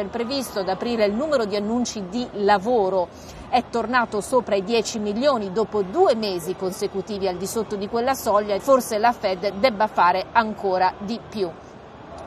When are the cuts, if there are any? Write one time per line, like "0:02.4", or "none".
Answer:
0:08.6